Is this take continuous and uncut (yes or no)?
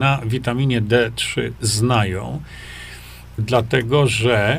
no